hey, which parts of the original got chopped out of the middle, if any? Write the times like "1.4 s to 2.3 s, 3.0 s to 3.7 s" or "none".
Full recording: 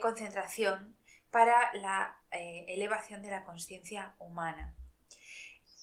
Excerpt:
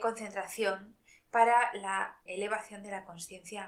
2.3 s to 2.7 s